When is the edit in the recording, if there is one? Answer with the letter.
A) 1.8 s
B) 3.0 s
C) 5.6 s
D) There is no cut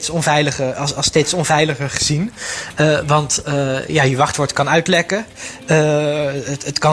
D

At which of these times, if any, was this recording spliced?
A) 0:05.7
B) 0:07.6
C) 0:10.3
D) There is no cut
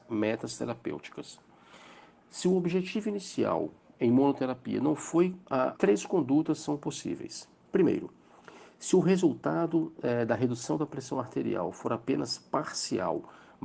A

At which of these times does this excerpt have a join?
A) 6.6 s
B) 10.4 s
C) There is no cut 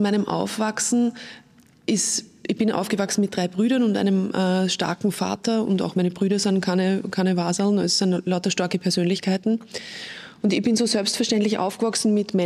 B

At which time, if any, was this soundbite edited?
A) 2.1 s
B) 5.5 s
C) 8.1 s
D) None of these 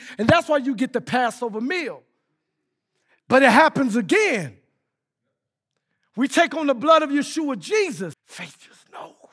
C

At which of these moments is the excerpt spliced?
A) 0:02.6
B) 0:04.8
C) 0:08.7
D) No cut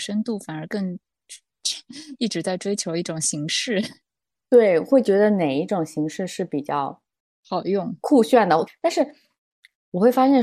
C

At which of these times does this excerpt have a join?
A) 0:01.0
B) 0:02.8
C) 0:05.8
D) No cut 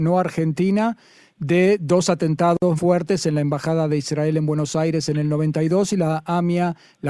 B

